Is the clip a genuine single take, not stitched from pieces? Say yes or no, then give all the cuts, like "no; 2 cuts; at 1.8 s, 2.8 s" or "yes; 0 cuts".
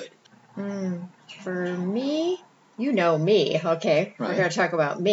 yes; 0 cuts